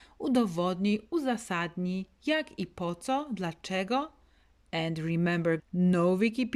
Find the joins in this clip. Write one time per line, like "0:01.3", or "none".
0:05.6